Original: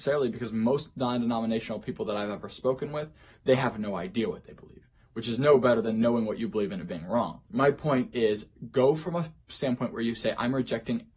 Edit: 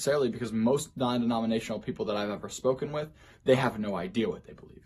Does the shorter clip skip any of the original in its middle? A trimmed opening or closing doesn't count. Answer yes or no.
no